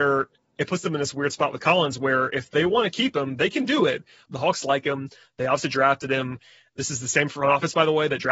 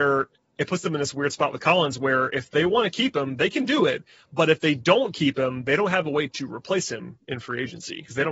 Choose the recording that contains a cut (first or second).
first